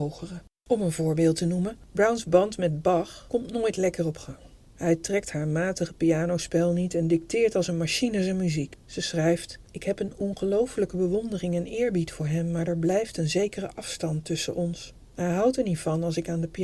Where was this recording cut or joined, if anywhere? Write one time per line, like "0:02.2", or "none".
0:15.1